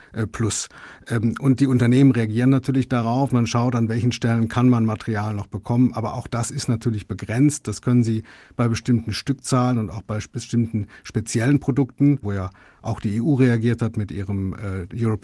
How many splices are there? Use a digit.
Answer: 2